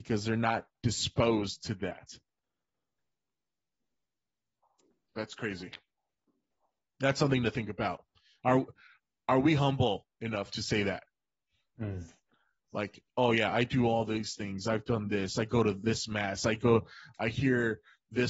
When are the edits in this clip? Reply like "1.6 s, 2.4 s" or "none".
none